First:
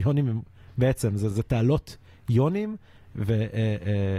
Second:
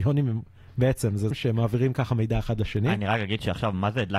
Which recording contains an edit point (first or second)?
second